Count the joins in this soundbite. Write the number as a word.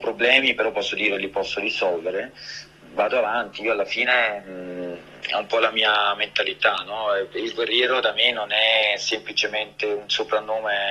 zero